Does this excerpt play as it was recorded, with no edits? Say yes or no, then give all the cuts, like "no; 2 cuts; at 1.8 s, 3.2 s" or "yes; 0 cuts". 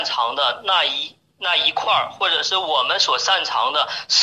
yes; 0 cuts